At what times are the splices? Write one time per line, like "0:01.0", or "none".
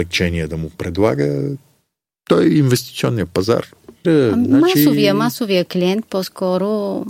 0:04.0